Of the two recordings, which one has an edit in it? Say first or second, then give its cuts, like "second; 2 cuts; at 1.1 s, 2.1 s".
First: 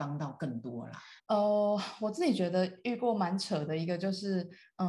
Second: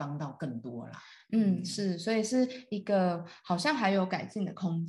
first; 1 cut; at 1.2 s